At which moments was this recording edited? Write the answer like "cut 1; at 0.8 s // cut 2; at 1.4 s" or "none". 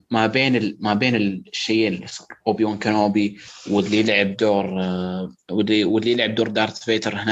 cut 1; at 2.4 s